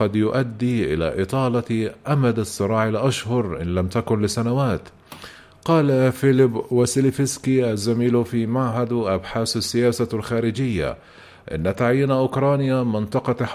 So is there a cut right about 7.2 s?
no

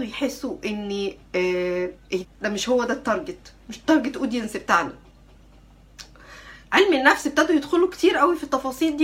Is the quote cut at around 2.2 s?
yes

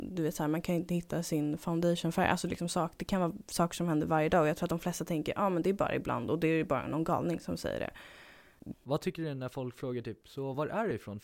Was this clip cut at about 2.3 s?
no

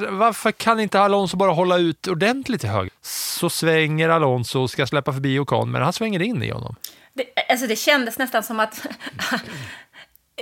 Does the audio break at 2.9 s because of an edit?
yes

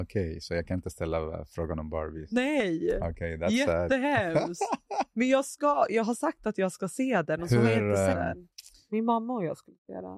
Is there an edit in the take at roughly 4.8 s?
no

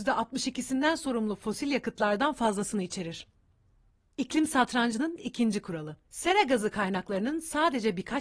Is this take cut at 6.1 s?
yes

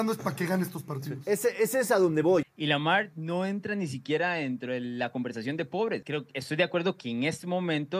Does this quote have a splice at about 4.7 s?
no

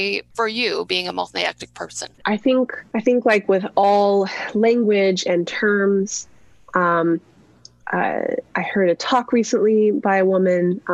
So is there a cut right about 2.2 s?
yes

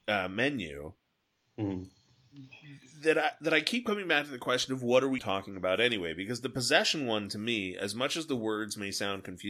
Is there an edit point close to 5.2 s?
yes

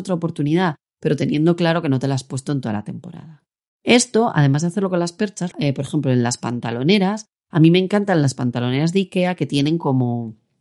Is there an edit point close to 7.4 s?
no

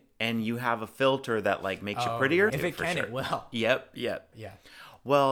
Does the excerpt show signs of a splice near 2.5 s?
yes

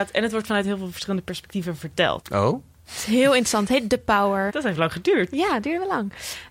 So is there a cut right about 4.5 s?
yes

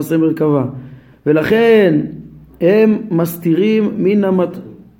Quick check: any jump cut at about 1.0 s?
no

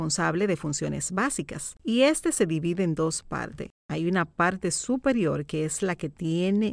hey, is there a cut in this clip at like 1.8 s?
no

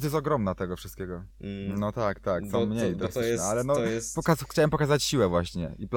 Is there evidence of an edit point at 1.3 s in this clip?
yes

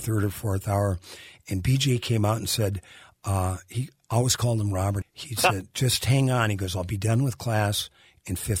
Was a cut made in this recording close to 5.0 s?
yes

